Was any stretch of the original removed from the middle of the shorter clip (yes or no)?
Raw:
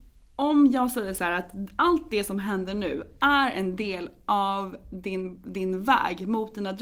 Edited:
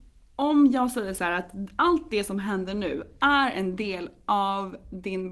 no